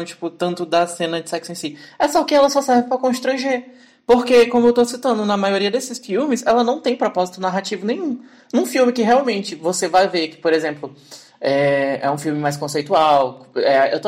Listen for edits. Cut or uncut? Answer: uncut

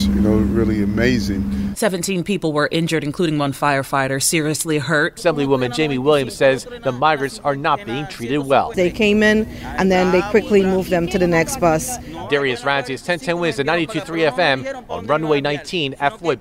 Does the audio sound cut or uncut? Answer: cut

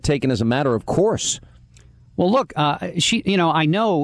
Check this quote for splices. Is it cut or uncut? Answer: uncut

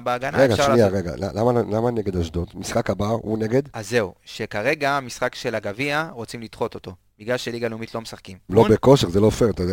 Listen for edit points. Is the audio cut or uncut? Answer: cut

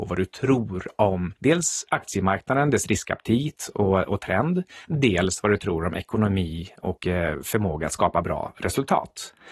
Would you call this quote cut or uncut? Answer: uncut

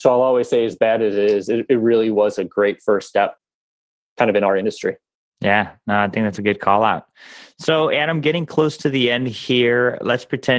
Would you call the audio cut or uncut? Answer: uncut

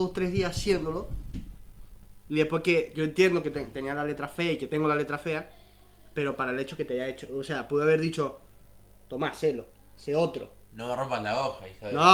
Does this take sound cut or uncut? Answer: uncut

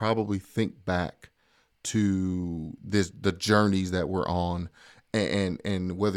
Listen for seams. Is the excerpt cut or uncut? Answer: uncut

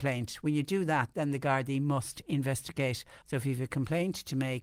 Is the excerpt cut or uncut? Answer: cut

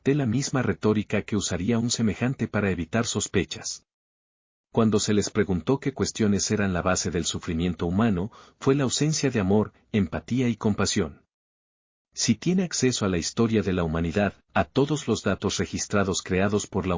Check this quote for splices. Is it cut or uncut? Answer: uncut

